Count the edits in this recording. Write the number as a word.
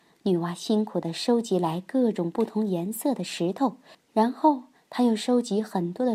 one